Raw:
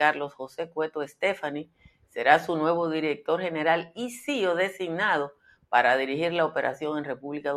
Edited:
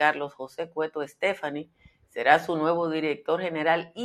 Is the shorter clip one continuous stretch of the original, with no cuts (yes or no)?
yes